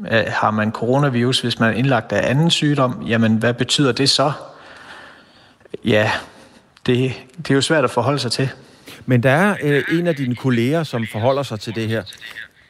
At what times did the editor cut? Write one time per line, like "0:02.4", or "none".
none